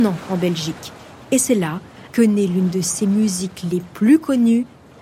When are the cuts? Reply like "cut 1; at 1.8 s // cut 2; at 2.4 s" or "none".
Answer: cut 1; at 2.1 s